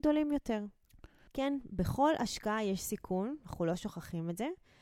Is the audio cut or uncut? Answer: cut